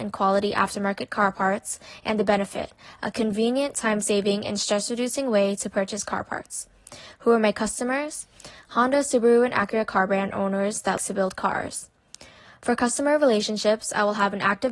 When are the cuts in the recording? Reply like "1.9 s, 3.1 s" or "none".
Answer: 11.0 s